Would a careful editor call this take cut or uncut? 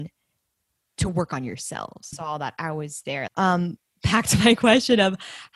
cut